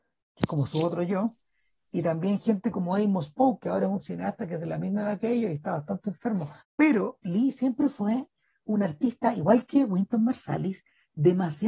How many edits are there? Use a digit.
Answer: 1